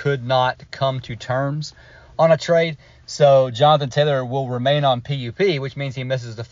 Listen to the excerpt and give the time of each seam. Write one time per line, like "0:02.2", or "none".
none